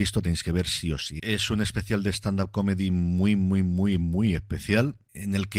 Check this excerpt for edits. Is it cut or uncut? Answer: cut